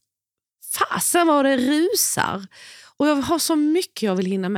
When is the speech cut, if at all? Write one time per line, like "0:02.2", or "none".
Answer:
none